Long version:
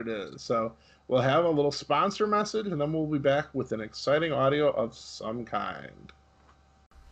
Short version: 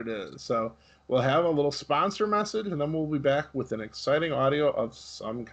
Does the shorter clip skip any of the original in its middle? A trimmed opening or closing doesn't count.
no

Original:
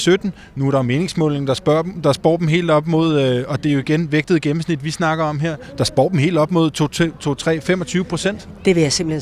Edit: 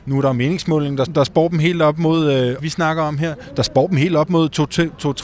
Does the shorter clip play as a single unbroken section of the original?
no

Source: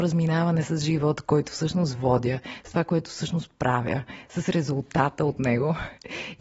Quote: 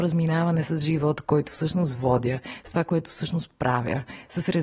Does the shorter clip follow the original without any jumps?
yes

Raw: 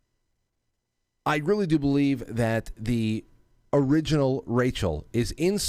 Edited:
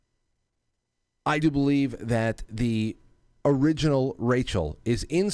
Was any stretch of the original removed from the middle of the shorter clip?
yes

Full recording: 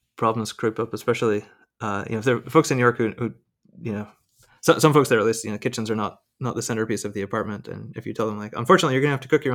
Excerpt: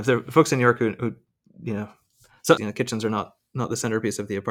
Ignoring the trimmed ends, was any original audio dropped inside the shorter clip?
yes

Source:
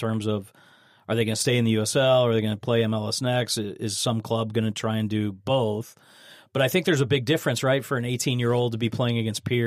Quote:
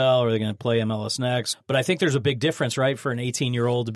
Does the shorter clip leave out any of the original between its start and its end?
yes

